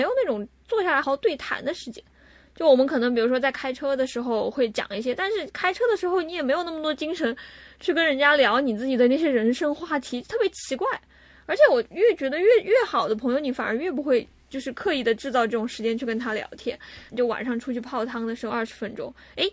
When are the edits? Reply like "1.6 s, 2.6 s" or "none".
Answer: 1.0 s, 17.1 s, 18.5 s